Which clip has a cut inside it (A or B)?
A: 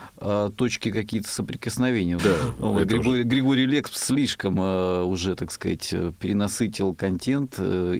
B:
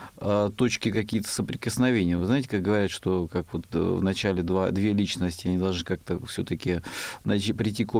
A